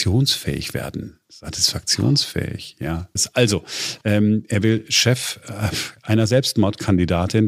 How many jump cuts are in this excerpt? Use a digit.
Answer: 1